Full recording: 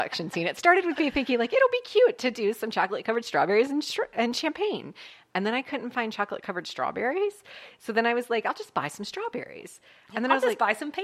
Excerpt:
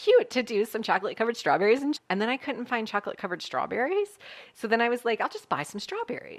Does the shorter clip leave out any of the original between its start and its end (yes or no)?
yes